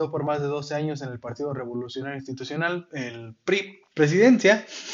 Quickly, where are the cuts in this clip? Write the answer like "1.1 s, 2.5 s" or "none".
3.9 s